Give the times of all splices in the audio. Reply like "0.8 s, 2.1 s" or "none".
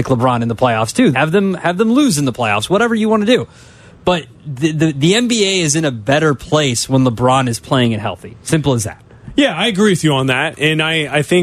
1.1 s

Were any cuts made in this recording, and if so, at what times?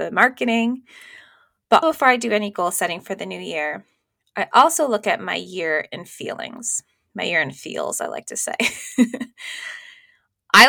none

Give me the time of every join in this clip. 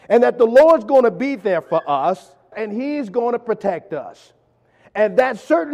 2.5 s

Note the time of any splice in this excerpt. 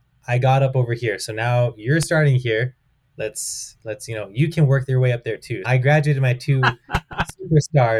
5.6 s

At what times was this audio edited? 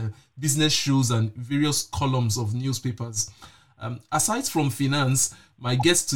none

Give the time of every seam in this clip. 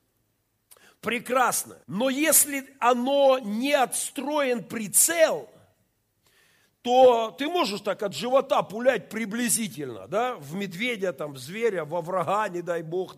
1.8 s

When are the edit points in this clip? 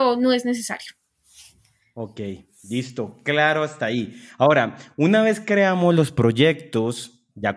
none

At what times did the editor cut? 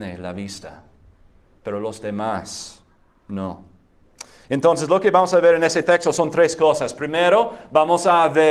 none

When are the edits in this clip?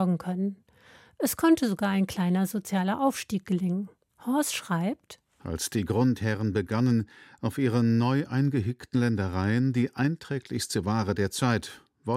4.1 s, 5.4 s

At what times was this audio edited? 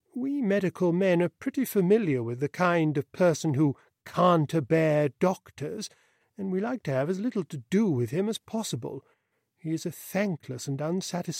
none

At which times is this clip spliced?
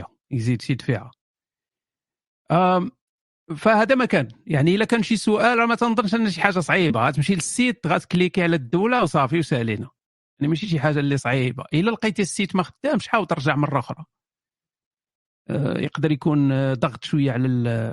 none

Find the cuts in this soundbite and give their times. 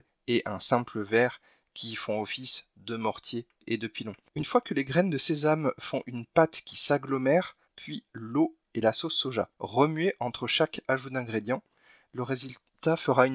4.3 s, 7.7 s, 9.5 s

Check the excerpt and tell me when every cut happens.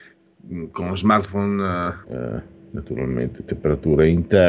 2.0 s

